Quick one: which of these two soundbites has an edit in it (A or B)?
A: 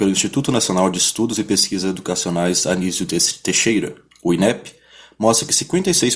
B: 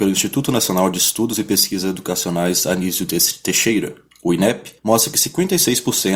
B